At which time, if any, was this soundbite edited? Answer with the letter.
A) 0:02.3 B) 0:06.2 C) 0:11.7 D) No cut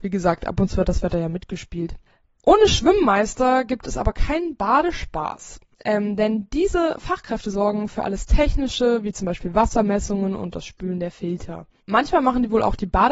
D